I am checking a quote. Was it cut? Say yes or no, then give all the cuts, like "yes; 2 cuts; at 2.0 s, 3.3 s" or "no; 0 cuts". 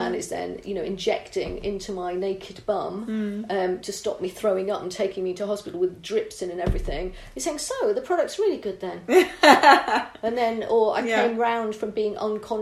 no; 0 cuts